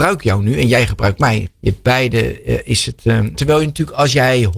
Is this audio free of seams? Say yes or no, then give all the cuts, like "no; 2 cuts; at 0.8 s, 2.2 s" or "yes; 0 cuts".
no; 2 cuts; at 1.5 s, 3.3 s